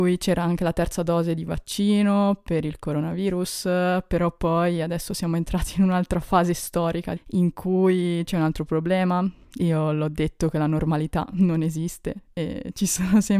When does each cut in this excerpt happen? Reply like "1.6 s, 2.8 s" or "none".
7.2 s